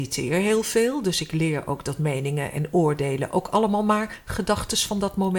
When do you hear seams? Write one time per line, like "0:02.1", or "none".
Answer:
none

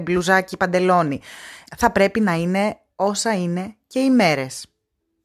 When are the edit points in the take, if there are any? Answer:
0:01.7

